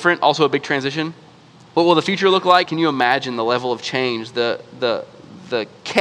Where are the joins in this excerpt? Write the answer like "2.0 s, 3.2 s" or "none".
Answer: 2.6 s